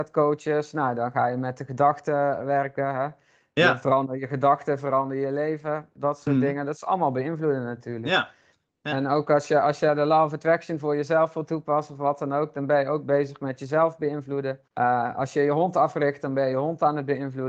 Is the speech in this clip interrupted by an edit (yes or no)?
yes